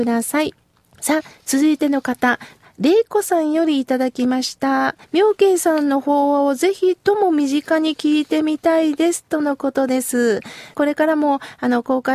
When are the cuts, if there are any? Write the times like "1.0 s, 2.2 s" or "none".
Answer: 5.0 s, 10.7 s